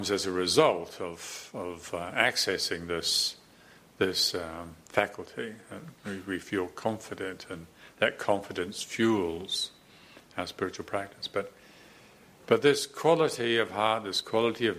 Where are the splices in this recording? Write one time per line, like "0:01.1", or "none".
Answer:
none